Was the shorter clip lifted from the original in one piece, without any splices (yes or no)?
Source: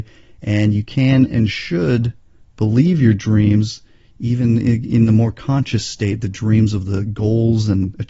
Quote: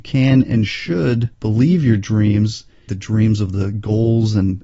no